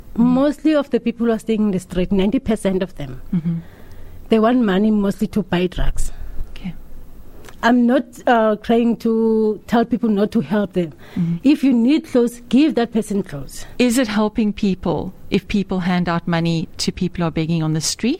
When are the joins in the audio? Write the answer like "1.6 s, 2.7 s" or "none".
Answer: 11.4 s, 13.8 s